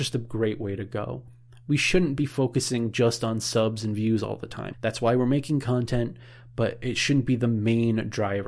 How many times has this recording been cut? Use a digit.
1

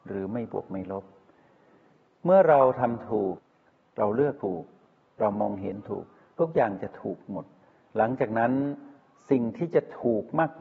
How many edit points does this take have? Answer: 0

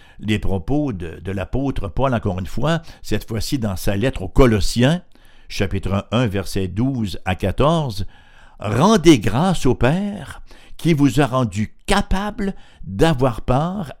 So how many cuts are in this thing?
0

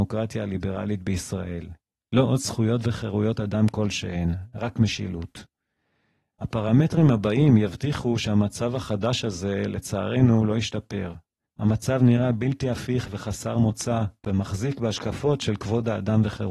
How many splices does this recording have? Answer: 2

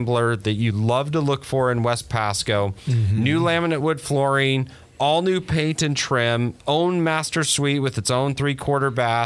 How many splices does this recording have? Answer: 1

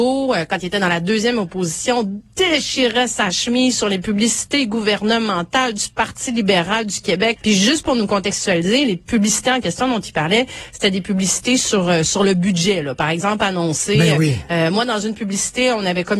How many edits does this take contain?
1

